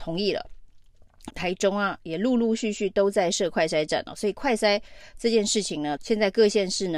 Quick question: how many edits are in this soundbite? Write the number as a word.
two